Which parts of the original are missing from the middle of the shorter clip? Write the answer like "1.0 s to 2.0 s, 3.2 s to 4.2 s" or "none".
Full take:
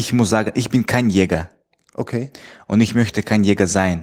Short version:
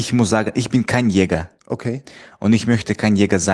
1.6 s to 1.9 s